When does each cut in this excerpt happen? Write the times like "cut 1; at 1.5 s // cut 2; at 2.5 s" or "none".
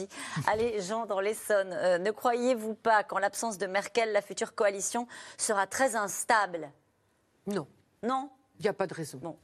none